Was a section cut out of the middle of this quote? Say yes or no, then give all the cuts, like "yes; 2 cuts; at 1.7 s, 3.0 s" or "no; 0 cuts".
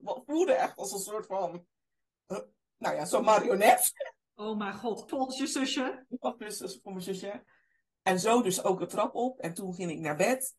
yes; 1 cut; at 5.1 s